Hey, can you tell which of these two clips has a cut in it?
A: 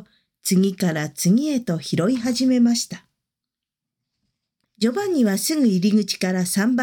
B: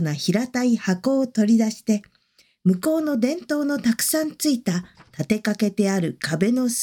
A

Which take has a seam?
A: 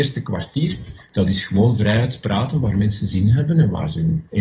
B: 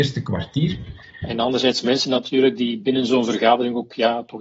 B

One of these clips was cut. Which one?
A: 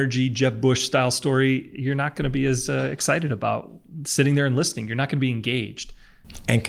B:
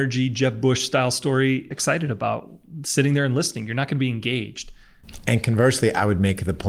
B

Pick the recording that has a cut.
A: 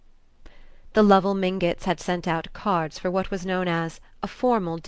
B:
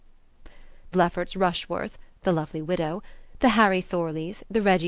B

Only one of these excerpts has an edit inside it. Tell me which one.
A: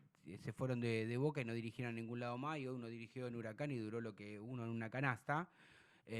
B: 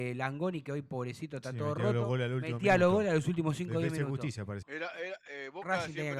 B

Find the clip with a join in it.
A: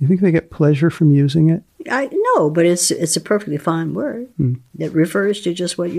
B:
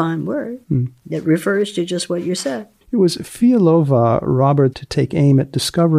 B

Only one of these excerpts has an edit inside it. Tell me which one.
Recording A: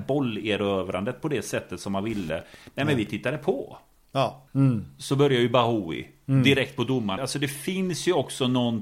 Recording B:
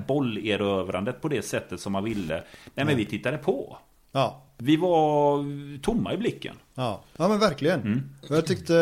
A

